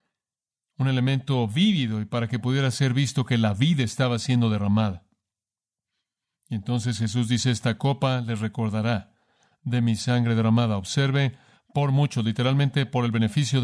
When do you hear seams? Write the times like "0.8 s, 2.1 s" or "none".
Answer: none